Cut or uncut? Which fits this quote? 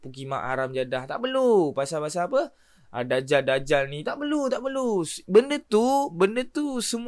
uncut